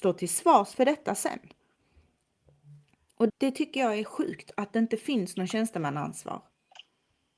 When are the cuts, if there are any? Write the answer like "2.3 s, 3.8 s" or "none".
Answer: 3.3 s